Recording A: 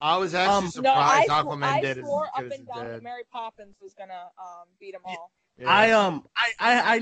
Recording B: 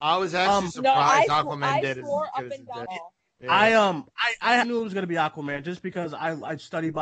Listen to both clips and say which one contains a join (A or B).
B